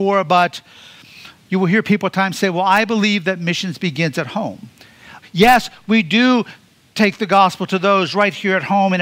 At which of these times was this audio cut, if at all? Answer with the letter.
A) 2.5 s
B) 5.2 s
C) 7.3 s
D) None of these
B